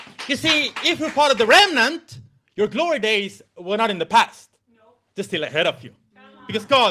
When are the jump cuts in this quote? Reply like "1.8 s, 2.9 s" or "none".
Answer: none